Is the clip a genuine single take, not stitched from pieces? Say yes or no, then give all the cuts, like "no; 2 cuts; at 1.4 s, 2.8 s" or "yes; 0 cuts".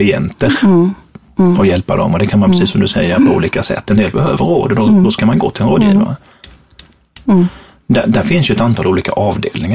no; 1 cut; at 7.3 s